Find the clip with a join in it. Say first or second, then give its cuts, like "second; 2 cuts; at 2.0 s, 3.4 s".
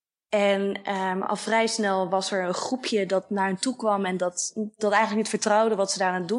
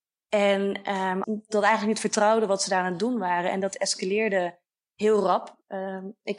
second; 1 cut; at 1.2 s